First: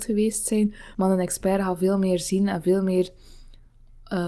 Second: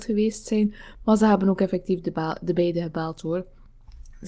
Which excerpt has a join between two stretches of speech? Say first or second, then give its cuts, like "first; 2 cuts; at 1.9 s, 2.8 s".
first; 1 cut; at 0.9 s